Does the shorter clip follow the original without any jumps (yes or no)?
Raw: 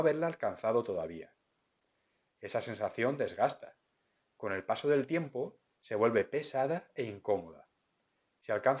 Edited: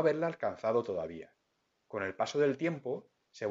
no